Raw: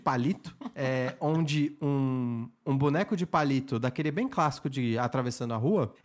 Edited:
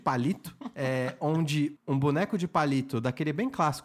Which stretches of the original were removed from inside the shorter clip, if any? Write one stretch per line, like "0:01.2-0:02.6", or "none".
0:01.8-0:02.6

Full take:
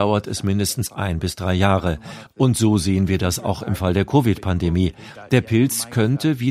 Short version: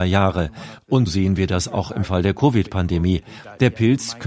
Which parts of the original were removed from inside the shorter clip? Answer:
0:02.5-0:02.8

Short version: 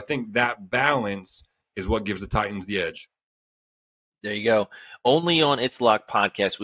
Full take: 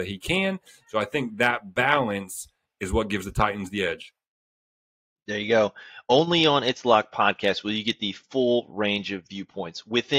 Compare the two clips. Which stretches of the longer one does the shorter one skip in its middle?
none

